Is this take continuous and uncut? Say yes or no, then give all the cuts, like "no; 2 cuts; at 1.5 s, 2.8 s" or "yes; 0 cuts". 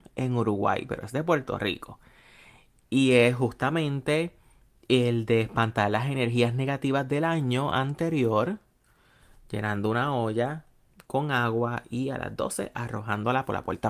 yes; 0 cuts